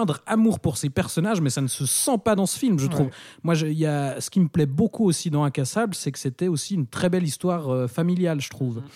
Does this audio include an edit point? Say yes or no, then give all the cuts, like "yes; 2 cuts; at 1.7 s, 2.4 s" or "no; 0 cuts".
no; 0 cuts